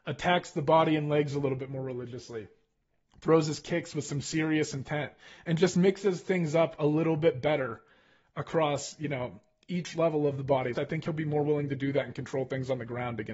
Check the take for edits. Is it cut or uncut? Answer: cut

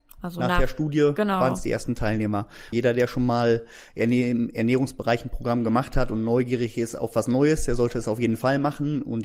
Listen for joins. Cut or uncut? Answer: cut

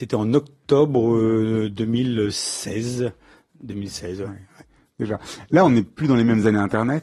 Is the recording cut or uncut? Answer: uncut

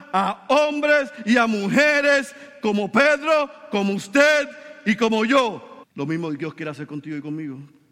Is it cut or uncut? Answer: cut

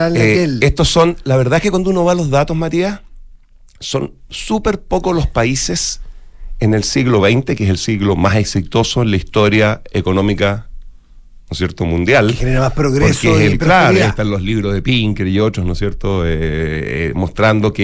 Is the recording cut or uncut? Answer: uncut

